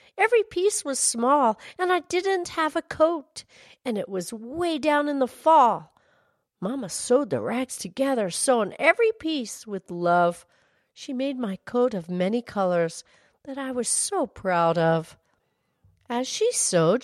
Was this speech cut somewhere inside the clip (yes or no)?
no